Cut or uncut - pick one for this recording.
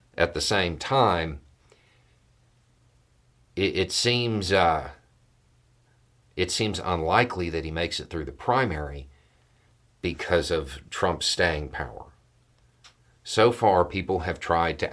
uncut